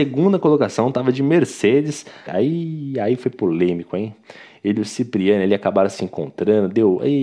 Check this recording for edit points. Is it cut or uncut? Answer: cut